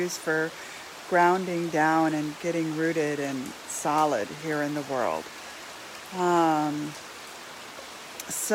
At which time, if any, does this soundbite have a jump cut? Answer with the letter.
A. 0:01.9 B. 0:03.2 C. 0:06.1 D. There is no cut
C